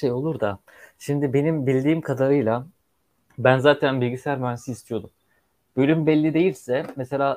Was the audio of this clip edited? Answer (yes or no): no